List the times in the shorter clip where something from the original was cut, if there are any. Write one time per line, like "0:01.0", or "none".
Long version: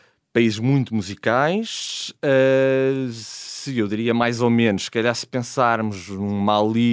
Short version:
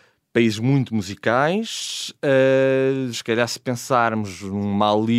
0:03.1